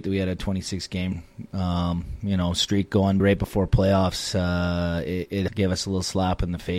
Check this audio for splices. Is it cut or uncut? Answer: cut